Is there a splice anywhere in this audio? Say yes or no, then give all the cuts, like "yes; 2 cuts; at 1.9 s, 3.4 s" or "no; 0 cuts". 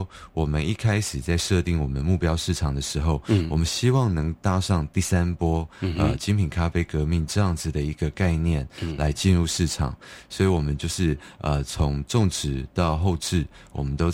no; 0 cuts